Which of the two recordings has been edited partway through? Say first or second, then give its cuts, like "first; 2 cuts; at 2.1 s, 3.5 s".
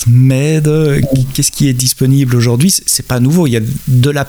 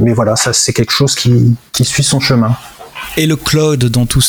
second; 1 cut; at 1.7 s